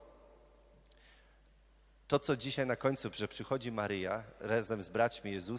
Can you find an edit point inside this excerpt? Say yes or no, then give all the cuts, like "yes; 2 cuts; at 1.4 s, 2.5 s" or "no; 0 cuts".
no; 0 cuts